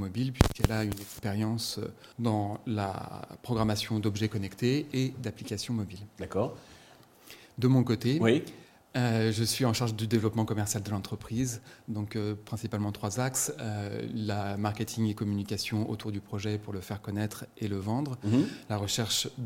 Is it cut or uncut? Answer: cut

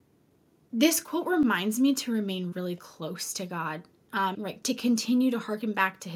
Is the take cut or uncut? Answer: cut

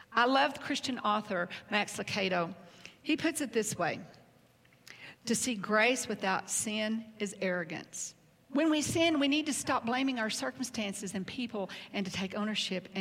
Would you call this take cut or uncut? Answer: cut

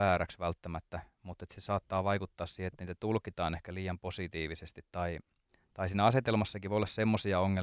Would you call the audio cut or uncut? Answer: uncut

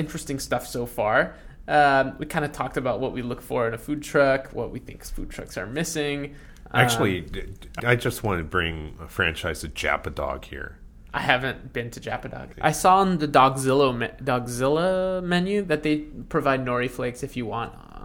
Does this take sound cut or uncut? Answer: cut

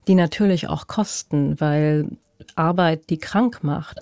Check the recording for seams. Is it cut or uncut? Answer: uncut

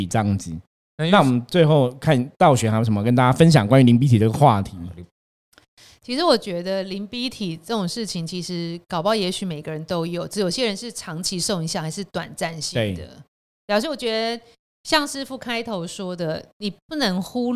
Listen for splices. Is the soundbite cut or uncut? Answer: uncut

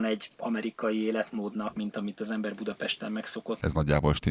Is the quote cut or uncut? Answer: cut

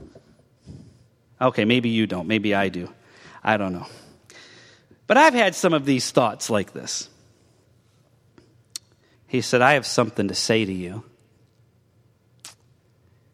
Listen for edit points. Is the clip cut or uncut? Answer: cut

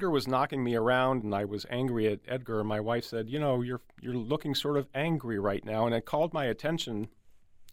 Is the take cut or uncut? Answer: cut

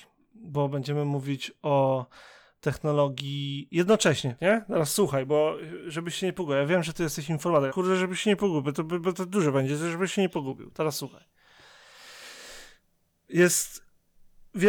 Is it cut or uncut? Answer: cut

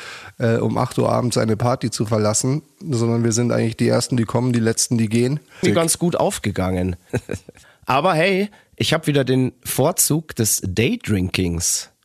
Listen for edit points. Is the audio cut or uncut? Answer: cut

